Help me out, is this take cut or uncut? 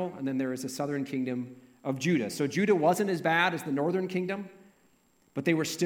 uncut